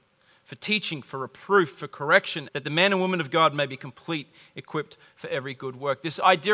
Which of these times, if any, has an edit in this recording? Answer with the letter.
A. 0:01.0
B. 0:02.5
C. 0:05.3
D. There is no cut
B